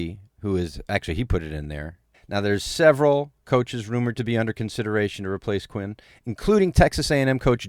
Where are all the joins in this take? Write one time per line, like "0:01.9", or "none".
0:02.1